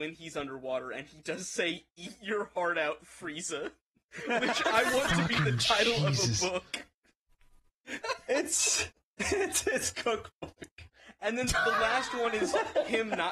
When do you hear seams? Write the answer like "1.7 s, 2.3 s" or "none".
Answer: 8.0 s